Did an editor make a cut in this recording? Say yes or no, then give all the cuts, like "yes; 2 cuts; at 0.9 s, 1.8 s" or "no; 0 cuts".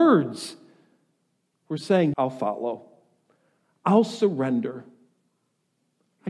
yes; 1 cut; at 2.1 s